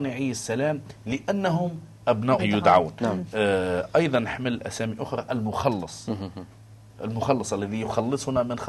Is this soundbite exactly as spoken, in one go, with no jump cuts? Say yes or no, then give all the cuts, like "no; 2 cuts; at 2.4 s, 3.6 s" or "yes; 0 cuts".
no; 1 cut; at 2.4 s